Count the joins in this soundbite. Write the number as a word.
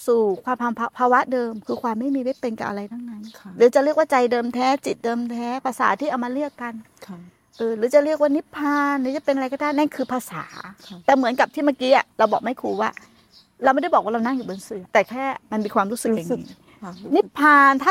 one